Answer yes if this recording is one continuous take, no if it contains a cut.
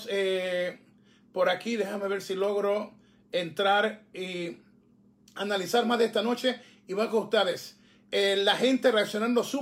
yes